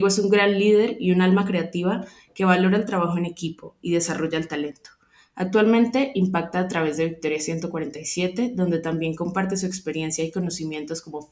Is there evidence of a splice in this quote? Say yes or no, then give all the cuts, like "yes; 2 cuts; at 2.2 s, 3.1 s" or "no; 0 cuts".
no; 0 cuts